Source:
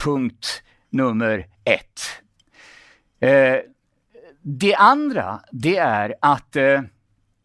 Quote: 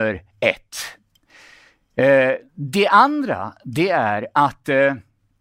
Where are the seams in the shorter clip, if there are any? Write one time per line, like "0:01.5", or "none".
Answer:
0:02.5